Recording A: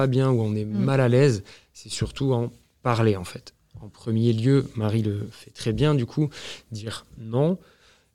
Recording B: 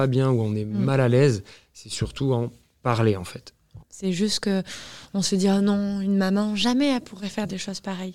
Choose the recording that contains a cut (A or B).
B